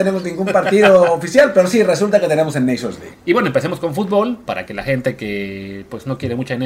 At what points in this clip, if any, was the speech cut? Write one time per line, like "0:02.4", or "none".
0:03.1

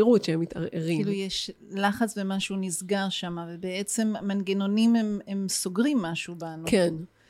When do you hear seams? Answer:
none

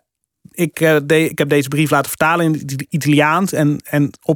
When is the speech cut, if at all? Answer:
none

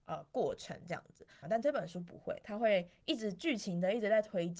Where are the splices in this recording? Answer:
0:01.4

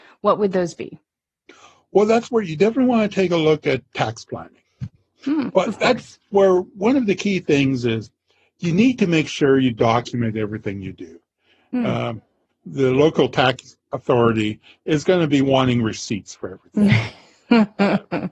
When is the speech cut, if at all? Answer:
0:05.5
0:12.5

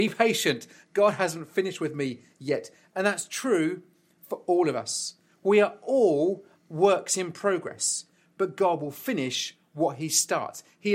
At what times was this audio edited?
none

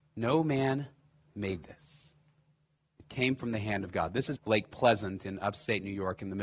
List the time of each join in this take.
0:04.4

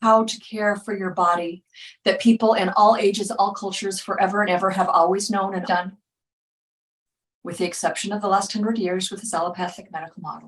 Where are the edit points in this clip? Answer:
0:05.6

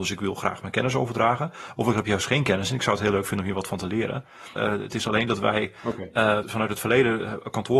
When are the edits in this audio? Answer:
0:04.6
0:06.4

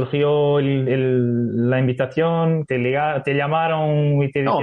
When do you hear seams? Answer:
0:02.7

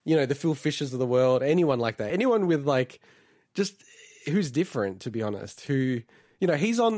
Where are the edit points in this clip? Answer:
none

